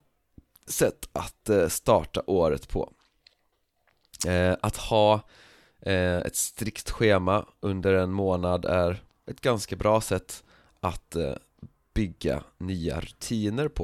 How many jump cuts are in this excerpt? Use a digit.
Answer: 0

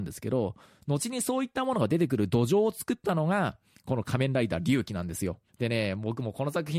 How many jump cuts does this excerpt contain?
1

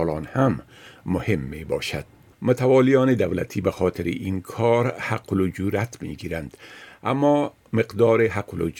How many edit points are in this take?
1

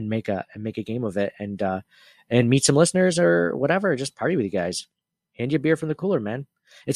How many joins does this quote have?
1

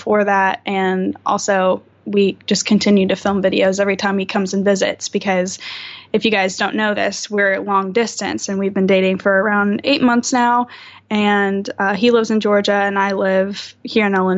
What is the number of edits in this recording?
0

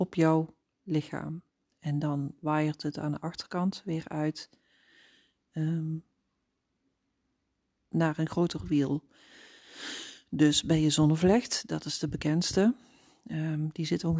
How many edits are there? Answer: 0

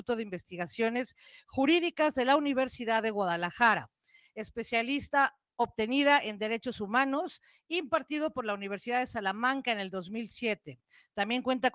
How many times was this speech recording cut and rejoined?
0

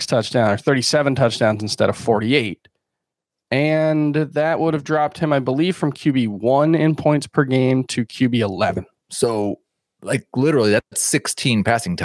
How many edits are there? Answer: 1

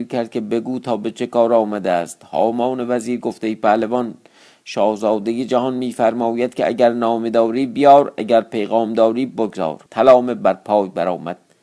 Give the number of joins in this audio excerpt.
1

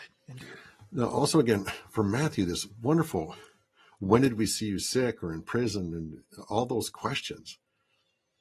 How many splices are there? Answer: 0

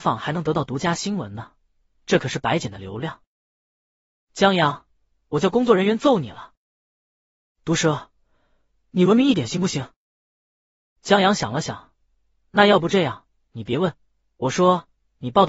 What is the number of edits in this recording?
0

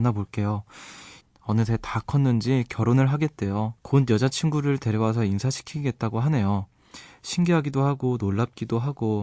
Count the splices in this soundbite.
2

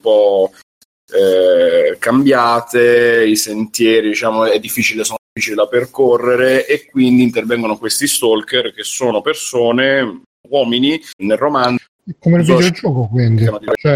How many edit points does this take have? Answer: 1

